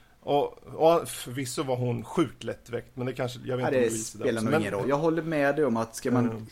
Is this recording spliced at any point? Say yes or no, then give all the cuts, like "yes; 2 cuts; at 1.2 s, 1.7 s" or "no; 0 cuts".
yes; 1 cut; at 4.8 s